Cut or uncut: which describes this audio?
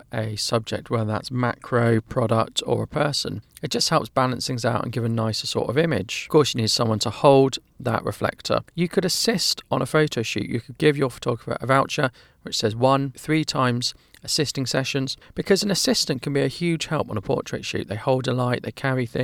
cut